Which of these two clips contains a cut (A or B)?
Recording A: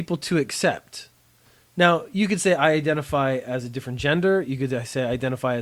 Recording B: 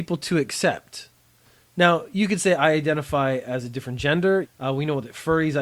B